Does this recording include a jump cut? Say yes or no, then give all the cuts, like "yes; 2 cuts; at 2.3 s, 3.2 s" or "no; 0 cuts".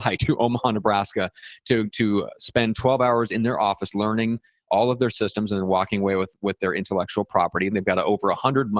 yes; 1 cut; at 7.7 s